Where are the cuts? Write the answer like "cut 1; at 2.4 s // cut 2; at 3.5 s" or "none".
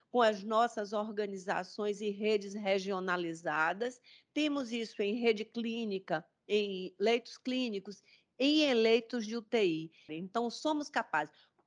cut 1; at 10.1 s